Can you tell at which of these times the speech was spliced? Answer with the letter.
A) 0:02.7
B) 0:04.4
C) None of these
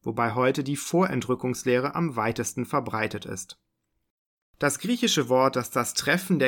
B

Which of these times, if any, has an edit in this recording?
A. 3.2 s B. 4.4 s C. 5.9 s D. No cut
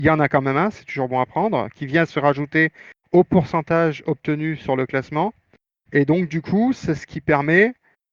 C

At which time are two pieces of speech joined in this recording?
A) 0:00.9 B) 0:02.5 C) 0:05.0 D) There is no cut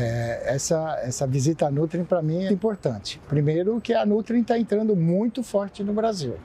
B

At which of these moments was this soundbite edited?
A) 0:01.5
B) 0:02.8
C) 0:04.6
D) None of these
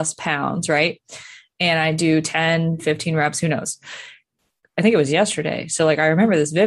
C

